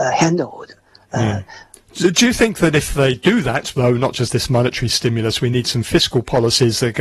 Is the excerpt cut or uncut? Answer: cut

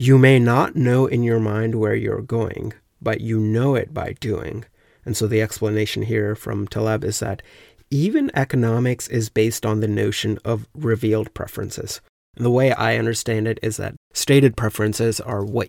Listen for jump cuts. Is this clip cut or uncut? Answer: cut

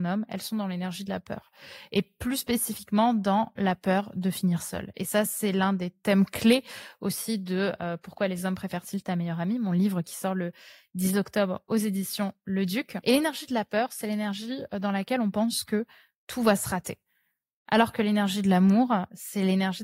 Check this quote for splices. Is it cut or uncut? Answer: uncut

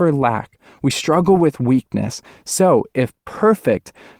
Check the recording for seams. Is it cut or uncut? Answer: uncut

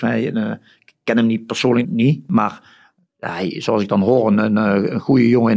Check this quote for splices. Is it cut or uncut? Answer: cut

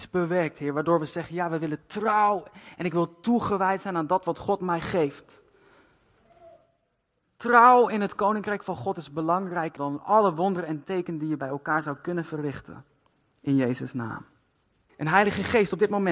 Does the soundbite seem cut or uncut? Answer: cut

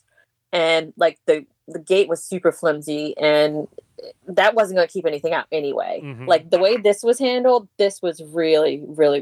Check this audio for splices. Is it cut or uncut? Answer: uncut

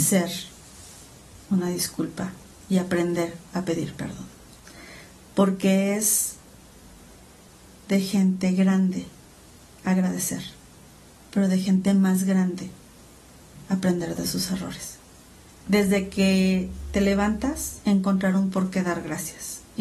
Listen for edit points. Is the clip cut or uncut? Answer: cut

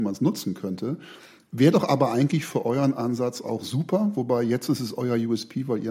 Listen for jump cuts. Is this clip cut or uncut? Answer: uncut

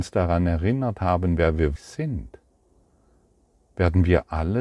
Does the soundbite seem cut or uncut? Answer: cut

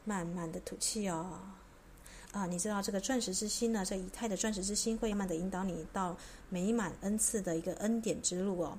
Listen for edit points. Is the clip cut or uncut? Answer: cut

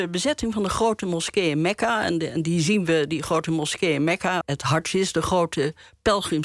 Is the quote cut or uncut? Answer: cut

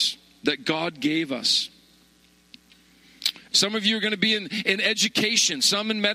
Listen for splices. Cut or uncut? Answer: cut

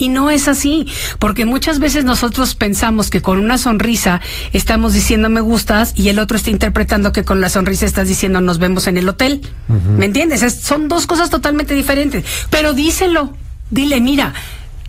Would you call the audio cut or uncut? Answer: cut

